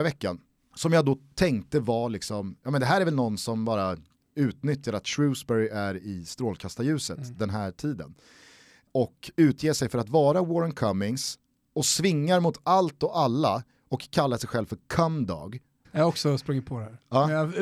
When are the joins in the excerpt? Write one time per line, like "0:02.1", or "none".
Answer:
0:15.8

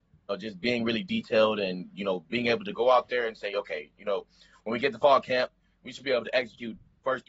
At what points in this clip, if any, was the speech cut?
none

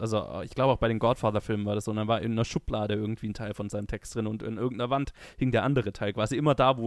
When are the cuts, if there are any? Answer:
none

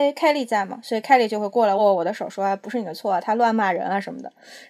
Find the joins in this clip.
0:01.8

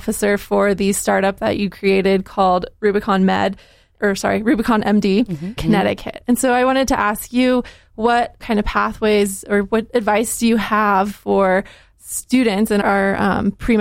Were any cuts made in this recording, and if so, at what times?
0:05.6
0:12.8

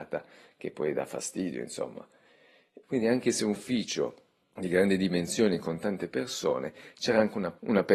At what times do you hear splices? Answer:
0:02.8

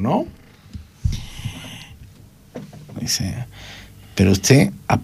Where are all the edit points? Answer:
0:02.9

